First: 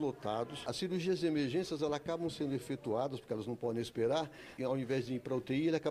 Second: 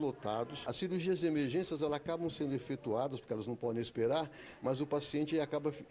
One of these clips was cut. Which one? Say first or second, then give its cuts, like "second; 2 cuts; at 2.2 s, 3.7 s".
first; 1 cut; at 4.6 s